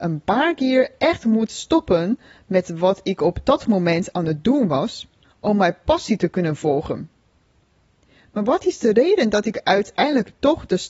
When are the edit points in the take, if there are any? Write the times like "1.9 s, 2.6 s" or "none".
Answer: 5.2 s